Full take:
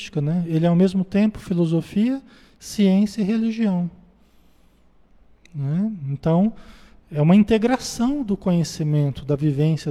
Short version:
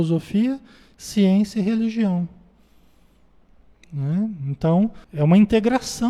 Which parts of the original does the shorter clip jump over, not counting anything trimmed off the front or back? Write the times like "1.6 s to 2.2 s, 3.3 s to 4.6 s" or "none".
6.7 s to 7.0 s